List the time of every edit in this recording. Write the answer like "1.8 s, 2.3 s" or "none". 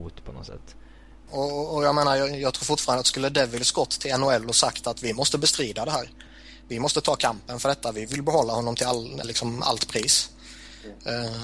1.3 s, 9.2 s